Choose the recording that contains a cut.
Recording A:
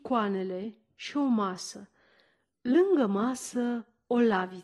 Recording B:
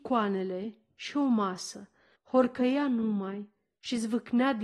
B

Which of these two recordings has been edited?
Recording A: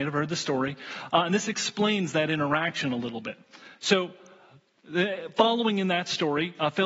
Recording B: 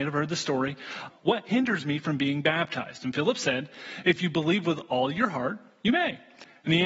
B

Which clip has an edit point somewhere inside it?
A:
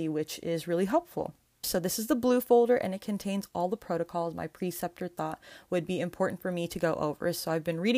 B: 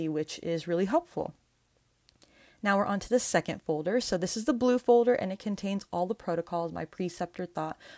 A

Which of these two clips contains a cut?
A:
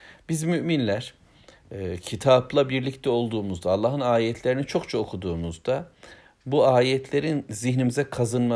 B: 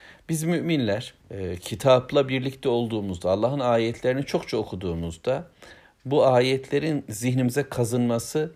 B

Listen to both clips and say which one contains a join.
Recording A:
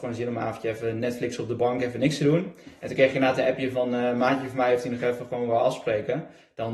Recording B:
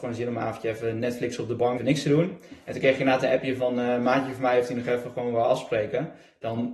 B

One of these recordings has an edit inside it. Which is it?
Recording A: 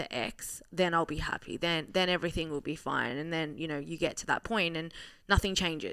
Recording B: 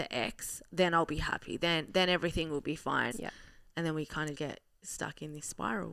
B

